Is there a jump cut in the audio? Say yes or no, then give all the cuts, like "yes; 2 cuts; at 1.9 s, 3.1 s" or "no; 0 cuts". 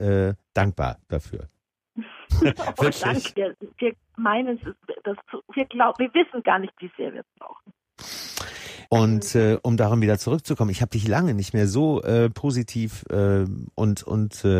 yes; 2 cuts; at 3.3 s, 8.9 s